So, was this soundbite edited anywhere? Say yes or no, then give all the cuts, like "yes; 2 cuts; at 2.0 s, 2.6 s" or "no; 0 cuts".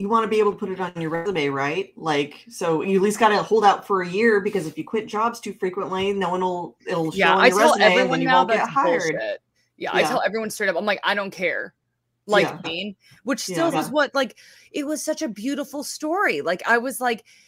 yes; 2 cuts; at 12.6 s, 13.7 s